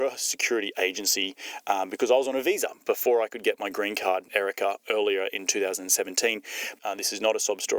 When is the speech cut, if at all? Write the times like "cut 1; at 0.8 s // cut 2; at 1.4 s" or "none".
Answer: cut 1; at 4.3 s // cut 2; at 6.8 s